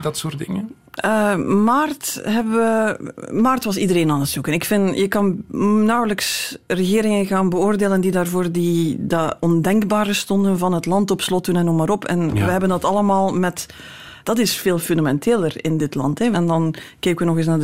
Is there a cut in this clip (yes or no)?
yes